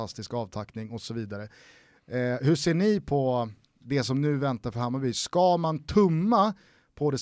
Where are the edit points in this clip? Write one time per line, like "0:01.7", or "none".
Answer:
none